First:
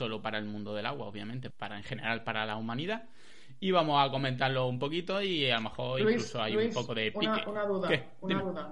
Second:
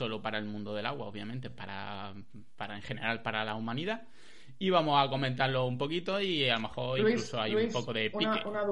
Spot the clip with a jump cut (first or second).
first